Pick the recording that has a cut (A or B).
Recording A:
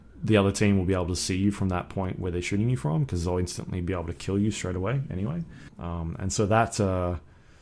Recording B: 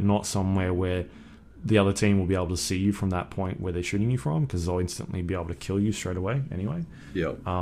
A